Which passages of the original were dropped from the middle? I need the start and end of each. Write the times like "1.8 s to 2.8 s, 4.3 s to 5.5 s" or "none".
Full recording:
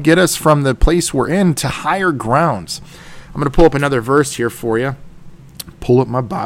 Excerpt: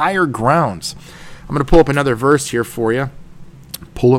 none

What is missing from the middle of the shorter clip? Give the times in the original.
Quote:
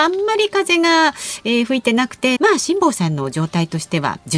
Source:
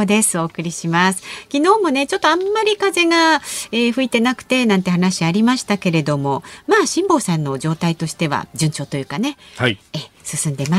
4.6 s to 6.6 s

